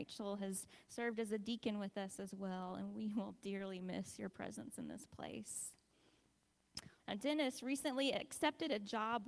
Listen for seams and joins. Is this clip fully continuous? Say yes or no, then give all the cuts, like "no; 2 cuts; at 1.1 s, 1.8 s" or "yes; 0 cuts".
no; 1 cut; at 7.0 s